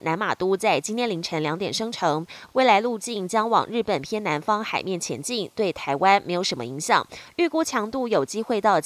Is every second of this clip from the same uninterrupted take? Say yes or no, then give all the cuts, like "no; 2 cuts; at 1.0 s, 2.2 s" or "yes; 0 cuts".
yes; 0 cuts